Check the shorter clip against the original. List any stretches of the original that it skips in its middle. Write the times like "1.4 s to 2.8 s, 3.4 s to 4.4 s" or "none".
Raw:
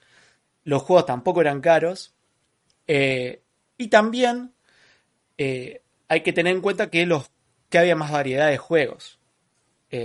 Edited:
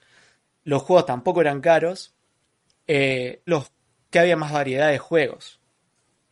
3.5 s to 7.1 s